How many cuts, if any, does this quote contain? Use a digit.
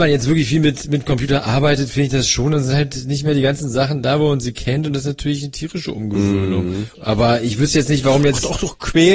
1